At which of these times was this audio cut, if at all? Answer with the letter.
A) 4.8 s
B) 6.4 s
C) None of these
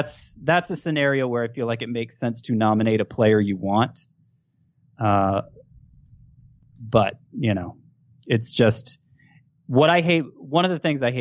C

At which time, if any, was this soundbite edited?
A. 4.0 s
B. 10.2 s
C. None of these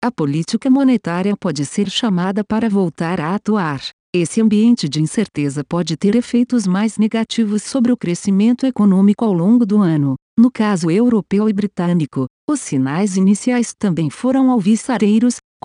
A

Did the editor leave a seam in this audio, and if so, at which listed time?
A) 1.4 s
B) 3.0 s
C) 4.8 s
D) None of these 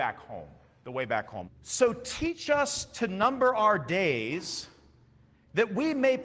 A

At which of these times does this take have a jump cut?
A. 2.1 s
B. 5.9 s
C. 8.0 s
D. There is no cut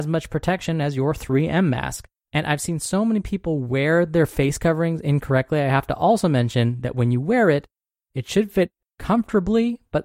A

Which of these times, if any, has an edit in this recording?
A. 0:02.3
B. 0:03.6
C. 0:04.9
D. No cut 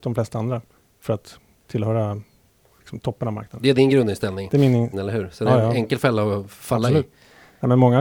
C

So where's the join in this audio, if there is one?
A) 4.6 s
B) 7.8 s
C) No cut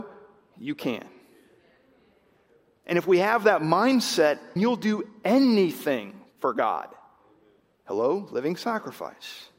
A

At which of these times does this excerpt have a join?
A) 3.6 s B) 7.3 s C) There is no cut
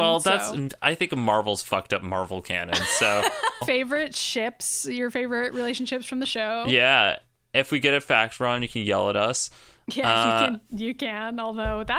A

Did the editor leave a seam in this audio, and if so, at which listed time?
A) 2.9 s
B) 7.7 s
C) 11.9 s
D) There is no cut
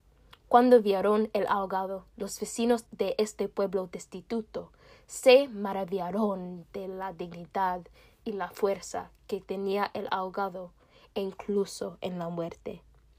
A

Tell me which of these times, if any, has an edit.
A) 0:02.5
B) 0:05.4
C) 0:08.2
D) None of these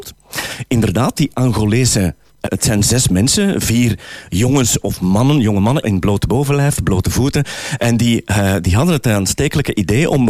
A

